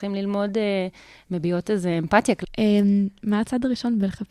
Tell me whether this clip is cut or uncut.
cut